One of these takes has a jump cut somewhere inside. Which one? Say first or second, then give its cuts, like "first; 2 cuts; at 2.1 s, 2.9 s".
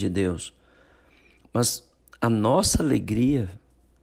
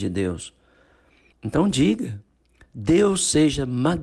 second; 1 cut; at 1.3 s